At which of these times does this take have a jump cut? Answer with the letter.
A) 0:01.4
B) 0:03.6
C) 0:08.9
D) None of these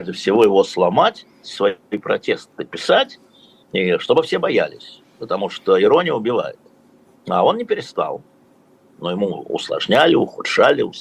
A